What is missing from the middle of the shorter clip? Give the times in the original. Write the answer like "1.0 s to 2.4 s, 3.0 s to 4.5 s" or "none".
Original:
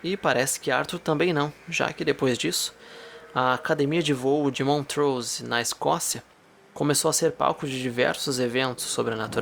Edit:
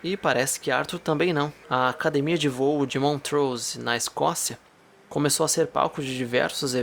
1.6 s to 3.3 s